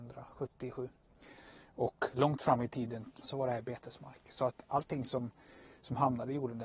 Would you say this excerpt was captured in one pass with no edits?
no; 1 cut; at 3.2 s

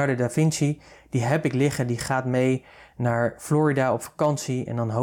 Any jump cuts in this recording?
no; 0 cuts

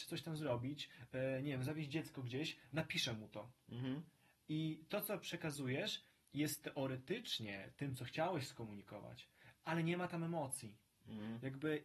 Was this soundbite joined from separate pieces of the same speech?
no; 0 cuts

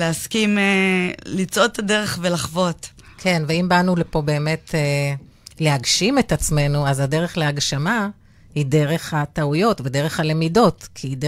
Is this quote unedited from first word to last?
yes; 0 cuts

